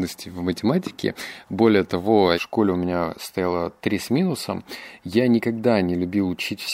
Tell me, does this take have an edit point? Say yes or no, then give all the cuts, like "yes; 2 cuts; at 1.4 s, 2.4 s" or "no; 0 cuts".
yes; 1 cut; at 2.3 s